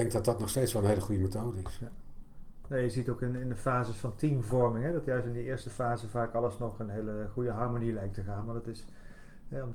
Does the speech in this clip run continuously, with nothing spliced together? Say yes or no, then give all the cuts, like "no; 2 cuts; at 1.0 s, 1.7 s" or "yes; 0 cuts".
yes; 0 cuts